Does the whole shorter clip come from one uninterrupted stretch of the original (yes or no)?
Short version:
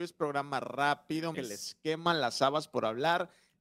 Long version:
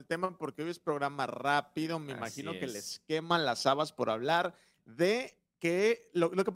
no